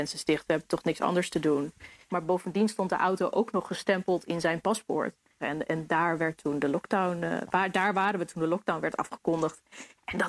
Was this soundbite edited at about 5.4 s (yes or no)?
yes